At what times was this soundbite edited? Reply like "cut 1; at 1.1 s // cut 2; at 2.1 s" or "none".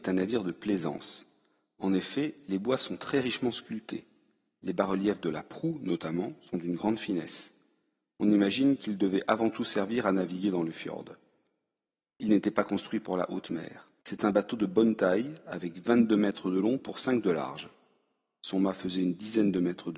cut 1; at 14.0 s